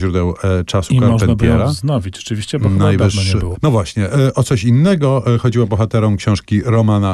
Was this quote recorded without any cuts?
no; 1 cut; at 3.5 s

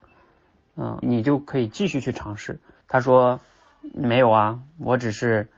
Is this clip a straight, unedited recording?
no; 2 cuts; at 1.0 s, 2.8 s

